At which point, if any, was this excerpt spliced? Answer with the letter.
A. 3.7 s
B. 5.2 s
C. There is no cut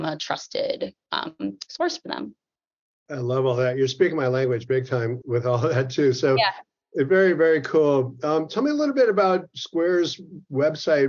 B